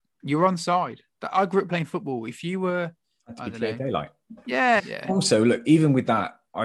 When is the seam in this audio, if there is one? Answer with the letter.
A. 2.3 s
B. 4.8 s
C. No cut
B